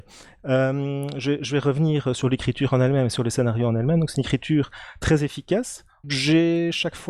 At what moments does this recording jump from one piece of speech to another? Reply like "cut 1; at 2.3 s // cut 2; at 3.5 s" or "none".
cut 1; at 2.1 s // cut 2; at 6.0 s